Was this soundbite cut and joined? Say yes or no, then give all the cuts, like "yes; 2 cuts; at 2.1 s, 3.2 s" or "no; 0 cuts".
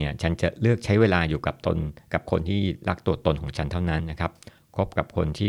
no; 0 cuts